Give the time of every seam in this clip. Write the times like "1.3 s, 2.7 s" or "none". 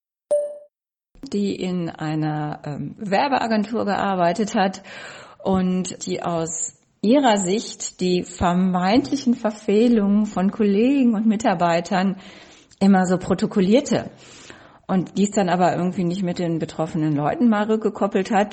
6.0 s